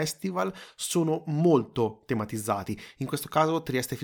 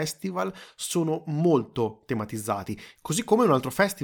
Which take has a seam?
second; 1 cut; at 3.0 s

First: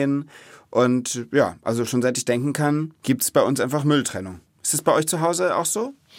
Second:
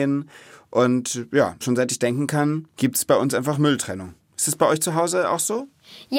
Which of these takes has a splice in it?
second; 1 cut; at 1.6 s

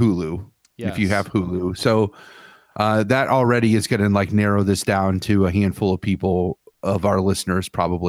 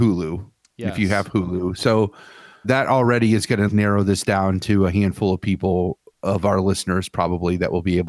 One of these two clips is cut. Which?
second; 2 cuts; at 2.6 s, 3.7 s

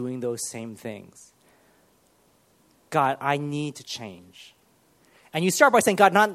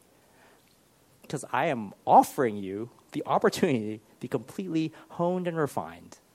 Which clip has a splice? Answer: second; 1 cut; at 1.2 s

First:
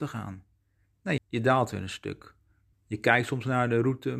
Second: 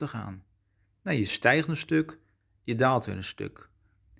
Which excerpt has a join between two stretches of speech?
first; 2 cuts; at 1.2 s, 2.7 s

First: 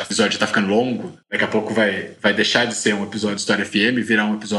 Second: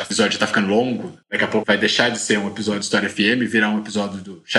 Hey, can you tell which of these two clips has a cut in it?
second; 1 cut; at 1.6 s

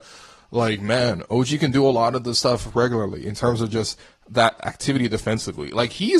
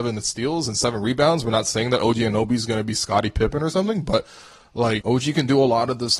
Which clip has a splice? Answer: second; 1 cut; at 5.0 s

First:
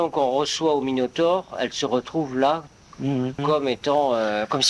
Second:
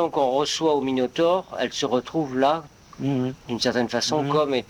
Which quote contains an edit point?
first; 1 cut; at 3.4 s

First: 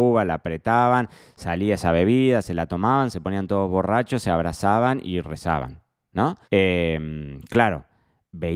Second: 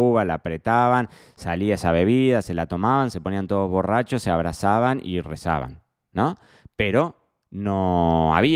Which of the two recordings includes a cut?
first; 1 cut; at 6.4 s

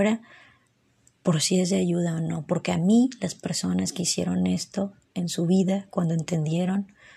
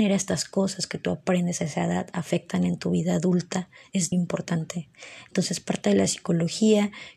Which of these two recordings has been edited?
second; 1 cut; at 4.1 s

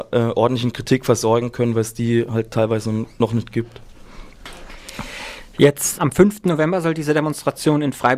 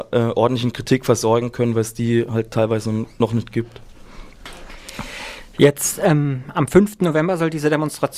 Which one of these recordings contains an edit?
first; 1 cut; at 6.0 s

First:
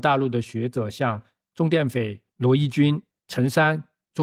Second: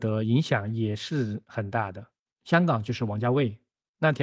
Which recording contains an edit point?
first; 1 cut; at 3.1 s

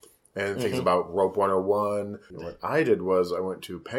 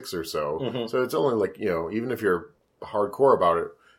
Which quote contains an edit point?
first; 1 cut; at 2.3 s

